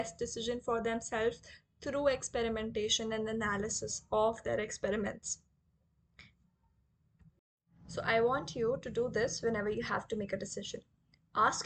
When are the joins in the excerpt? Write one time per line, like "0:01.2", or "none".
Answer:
none